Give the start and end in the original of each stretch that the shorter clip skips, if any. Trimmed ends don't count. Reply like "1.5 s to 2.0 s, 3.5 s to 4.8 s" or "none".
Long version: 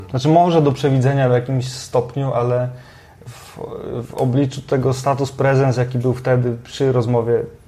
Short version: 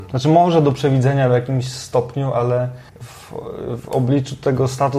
2.9 s to 3.1 s